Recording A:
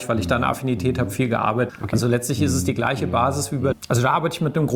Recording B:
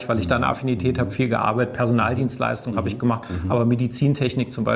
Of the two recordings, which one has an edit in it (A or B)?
A